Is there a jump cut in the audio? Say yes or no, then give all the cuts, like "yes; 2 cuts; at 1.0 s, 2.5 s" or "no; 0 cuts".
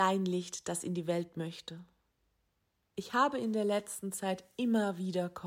yes; 1 cut; at 2.8 s